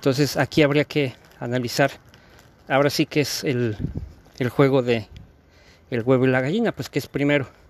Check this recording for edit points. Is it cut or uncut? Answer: uncut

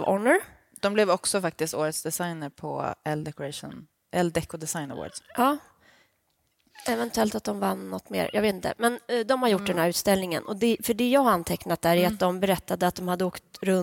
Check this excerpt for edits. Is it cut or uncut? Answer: uncut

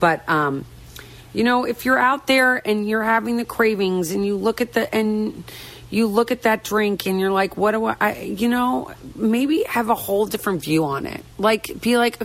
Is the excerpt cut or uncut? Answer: cut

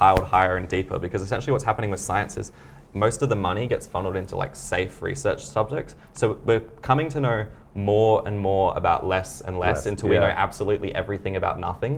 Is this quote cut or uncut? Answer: cut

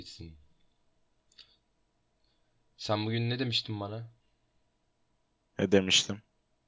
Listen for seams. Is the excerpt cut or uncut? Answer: uncut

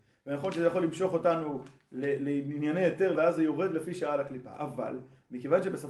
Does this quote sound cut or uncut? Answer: cut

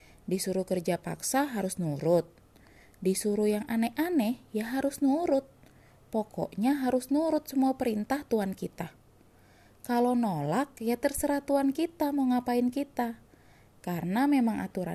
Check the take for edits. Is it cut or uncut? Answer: uncut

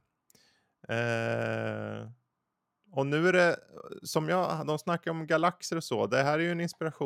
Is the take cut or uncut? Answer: uncut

